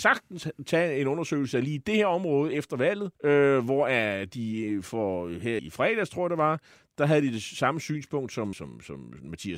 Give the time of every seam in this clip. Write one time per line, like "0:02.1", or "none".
0:03.2
0:05.6
0:08.5